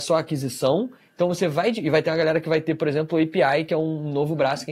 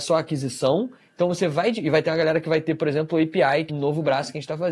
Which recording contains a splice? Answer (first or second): second